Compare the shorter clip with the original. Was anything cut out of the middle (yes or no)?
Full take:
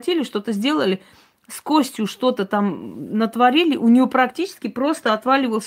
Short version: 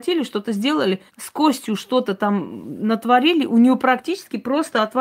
yes